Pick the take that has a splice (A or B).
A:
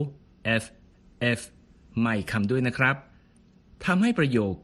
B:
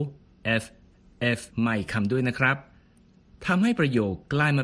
B